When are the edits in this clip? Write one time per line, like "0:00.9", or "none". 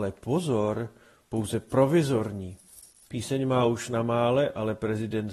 0:03.1